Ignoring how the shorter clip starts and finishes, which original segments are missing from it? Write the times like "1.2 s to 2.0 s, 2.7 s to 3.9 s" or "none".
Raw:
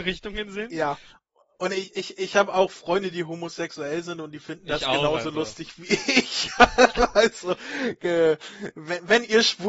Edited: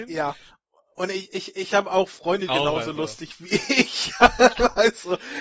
3.1 s to 4.9 s